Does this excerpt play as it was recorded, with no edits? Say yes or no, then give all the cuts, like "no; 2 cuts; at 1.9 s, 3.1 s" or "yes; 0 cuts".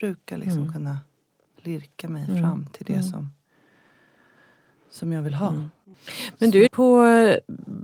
no; 1 cut; at 6.7 s